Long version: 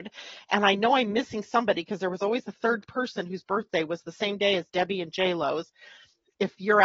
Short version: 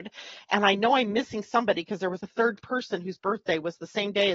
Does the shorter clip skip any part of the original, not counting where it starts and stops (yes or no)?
yes